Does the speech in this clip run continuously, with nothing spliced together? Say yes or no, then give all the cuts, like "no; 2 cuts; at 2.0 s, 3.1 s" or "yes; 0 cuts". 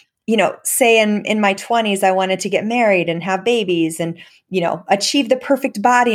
yes; 0 cuts